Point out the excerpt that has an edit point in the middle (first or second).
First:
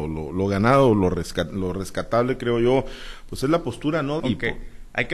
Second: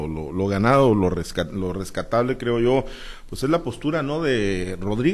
first